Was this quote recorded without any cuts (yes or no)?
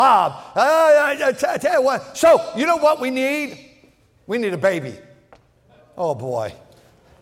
yes